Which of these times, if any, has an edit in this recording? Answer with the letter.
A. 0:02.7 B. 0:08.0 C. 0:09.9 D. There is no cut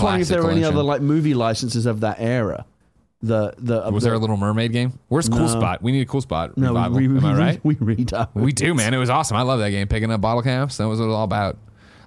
B